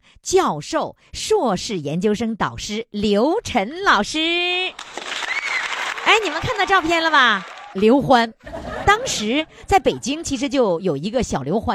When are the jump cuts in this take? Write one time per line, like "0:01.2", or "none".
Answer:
0:07.7
0:08.8

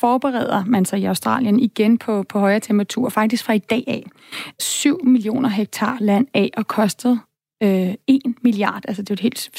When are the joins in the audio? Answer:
0:04.6

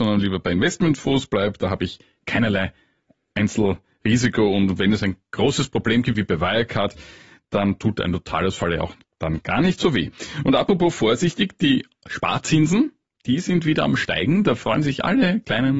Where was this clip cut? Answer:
0:06.1

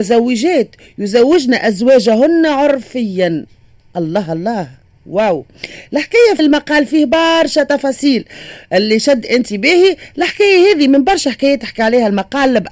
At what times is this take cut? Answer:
0:06.4

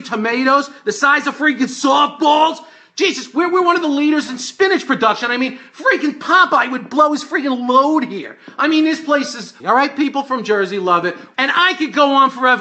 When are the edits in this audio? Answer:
0:09.6
0:11.3

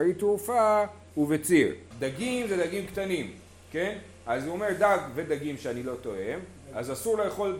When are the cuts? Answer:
0:01.9

